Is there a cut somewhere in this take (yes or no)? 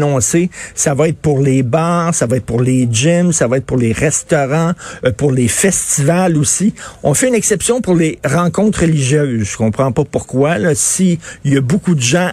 no